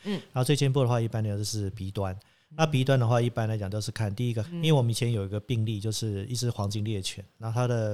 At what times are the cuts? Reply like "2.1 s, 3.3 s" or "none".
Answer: 4.4 s